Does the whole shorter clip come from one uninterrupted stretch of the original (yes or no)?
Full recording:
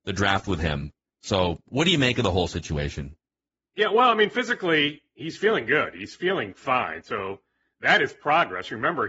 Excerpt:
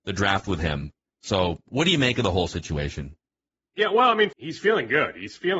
no